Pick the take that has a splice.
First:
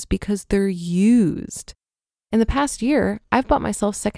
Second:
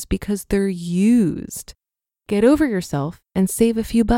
second; 1 cut; at 2.1 s

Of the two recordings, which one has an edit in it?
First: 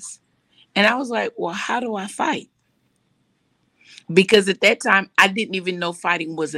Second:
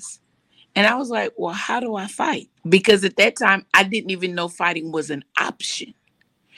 second; 1 cut; at 2.6 s

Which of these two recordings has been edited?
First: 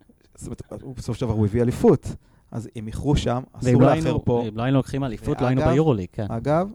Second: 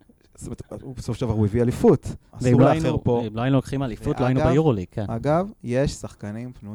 second; 1 cut; at 2.3 s

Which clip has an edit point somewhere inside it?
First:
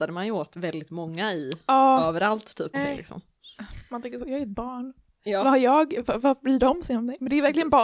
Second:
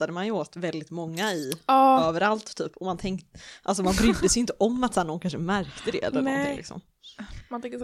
first; 1 cut; at 2.7 s

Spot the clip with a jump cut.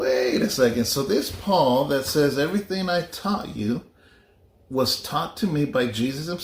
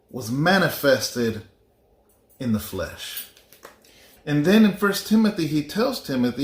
second; 1 cut; at 4.2 s

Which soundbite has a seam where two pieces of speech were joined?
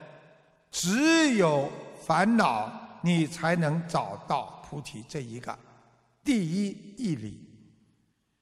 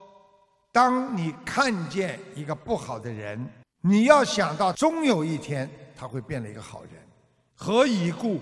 second; 1 cut; at 7.5 s

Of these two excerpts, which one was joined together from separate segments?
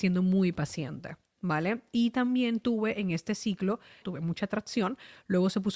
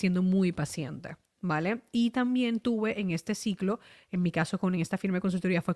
first; 1 cut; at 4.0 s

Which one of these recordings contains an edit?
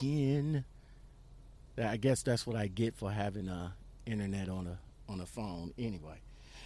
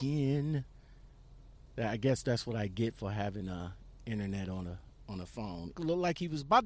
second; 1 cut; at 5.7 s

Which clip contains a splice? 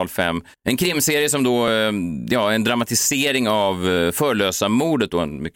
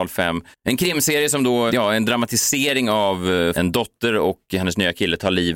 second; 2 cuts; at 1.7 s, 3.5 s

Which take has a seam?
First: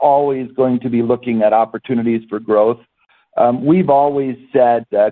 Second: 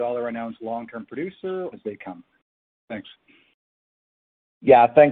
second; 1 cut; at 1.7 s

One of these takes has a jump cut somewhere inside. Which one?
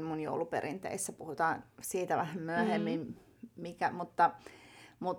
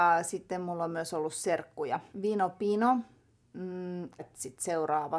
second; 2 cuts; at 2.1 s, 4.2 s

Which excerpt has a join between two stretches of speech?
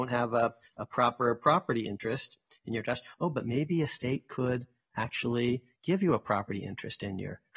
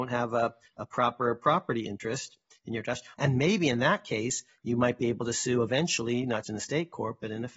second; 2 cuts; at 3.1 s, 6.4 s

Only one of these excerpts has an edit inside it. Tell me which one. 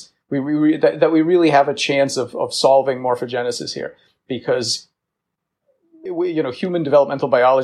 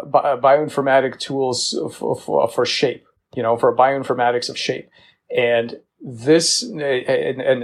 first; 1 cut; at 6.1 s

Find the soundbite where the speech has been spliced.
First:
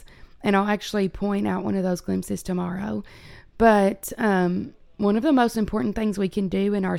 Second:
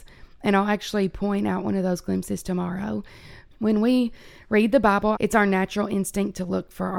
second; 2 cuts; at 3.5 s, 5.1 s

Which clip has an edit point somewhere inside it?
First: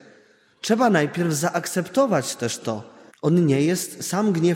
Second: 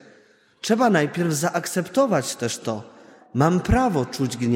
first; 1 cut; at 3.1 s

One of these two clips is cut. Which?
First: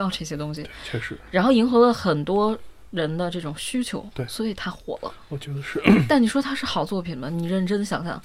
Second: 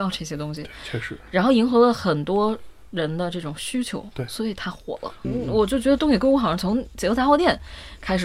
second; 1 cut; at 5.2 s

